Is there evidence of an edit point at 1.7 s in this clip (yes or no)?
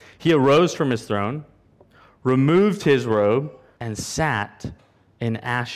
no